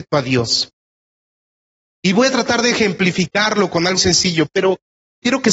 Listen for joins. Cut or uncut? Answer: cut